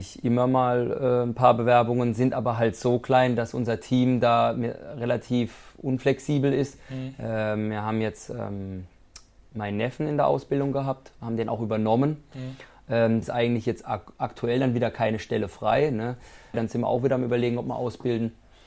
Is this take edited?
yes; 2 cuts; at 13.2 s, 16.5 s

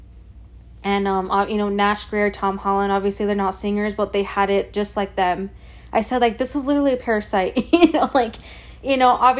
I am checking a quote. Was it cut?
no; 0 cuts

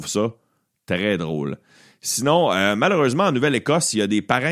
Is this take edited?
no; 0 cuts

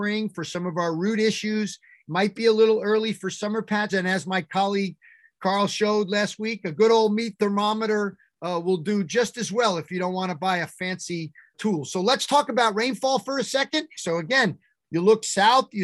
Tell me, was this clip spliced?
yes; 3 cuts; at 3.9 s, 11.5 s, 14.0 s

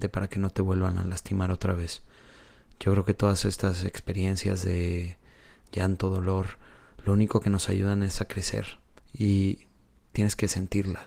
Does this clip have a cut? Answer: no; 0 cuts

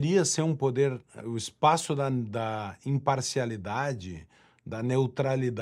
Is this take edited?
yes; 1 cut; at 1.2 s

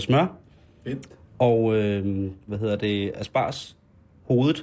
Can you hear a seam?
no; 0 cuts

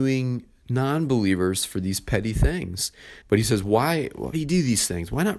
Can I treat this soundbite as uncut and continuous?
no; 2 cuts; at 3.2 s, 4.3 s

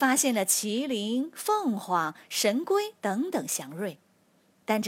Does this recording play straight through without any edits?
yes; 0 cuts

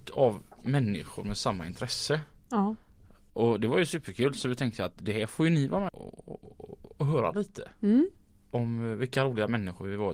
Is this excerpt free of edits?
no; 1 cut; at 5.9 s

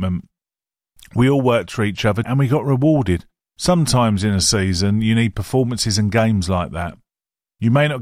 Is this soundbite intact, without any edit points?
no; 1 cut; at 2.2 s

